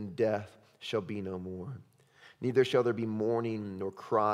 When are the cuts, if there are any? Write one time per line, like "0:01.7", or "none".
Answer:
none